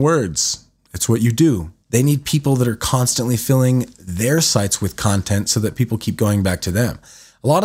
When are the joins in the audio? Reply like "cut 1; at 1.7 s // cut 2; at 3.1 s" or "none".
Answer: cut 1; at 1.8 s